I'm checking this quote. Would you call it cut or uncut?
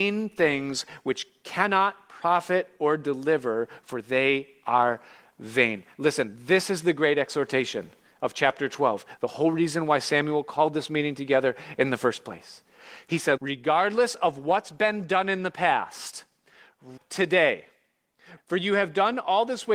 cut